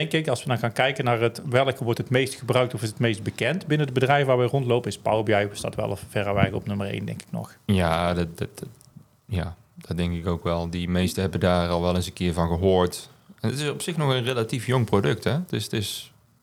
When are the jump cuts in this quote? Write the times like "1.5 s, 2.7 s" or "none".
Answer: none